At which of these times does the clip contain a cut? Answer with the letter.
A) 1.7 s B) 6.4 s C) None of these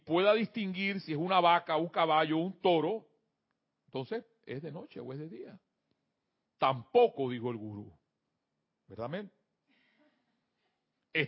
B